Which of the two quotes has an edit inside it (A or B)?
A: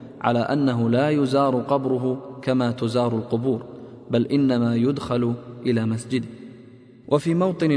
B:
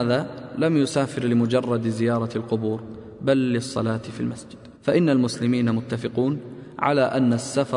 B